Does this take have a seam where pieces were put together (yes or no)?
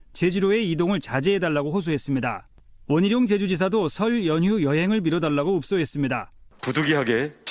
no